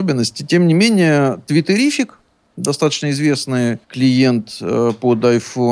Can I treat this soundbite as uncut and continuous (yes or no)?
no